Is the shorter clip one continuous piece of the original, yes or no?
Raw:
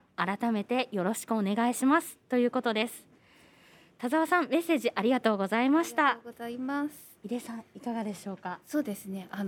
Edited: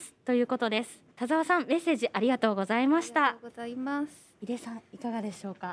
no